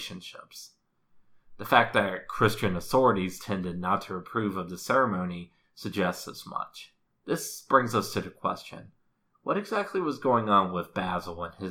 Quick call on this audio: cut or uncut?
cut